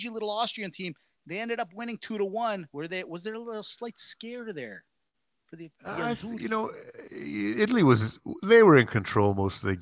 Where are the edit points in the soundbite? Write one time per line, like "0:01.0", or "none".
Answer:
0:02.7